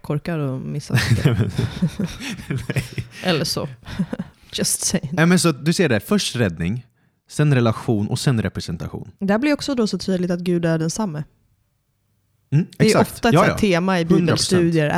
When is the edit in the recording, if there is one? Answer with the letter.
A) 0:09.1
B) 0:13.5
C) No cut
A